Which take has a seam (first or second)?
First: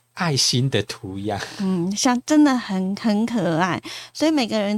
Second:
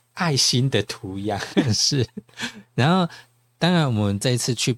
second